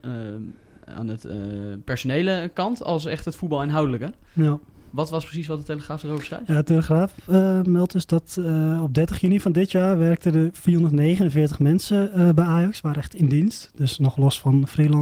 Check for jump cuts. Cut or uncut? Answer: uncut